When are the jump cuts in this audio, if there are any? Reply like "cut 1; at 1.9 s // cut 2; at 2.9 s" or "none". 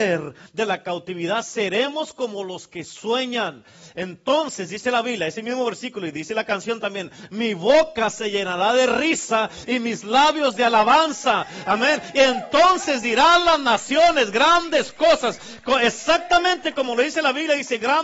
none